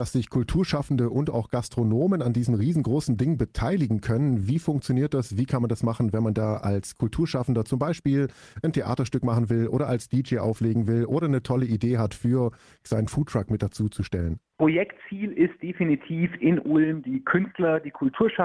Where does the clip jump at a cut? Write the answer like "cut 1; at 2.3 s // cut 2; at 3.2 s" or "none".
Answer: none